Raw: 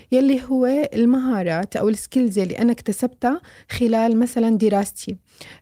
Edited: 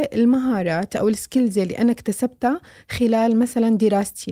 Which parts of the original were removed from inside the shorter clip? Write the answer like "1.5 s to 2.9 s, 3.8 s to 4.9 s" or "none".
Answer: none